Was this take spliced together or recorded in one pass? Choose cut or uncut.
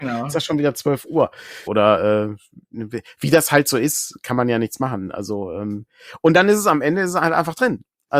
cut